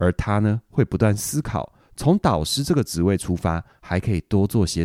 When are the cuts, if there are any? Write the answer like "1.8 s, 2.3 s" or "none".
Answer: none